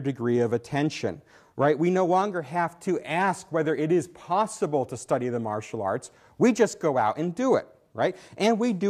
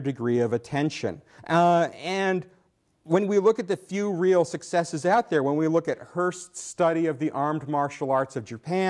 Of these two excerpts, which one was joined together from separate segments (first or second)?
second